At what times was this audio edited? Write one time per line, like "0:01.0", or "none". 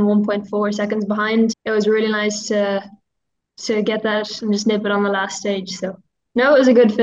0:01.5

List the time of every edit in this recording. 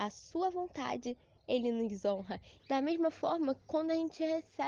0:02.6

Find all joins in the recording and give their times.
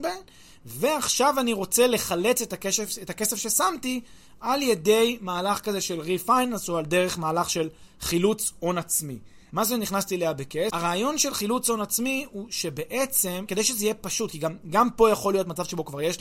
0:09.5
0:10.7
0:13.5

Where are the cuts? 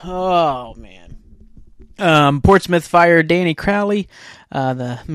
none

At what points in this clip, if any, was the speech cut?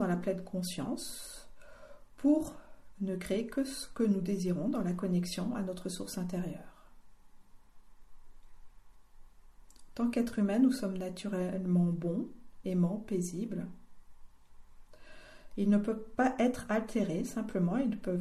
0:12.6
0:15.5

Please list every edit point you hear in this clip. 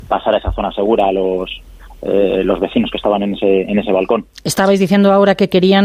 none

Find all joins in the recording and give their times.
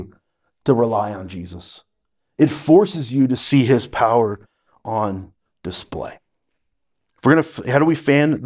none

